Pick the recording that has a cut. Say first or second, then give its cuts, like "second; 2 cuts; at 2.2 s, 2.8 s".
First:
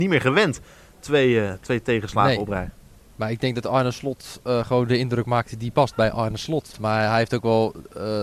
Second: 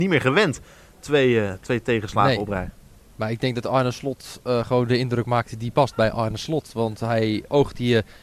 first; 1 cut; at 6.7 s